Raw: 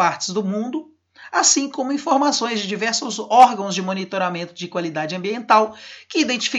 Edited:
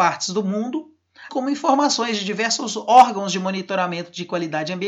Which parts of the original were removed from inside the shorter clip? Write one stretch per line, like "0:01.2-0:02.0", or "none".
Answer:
0:01.3-0:01.7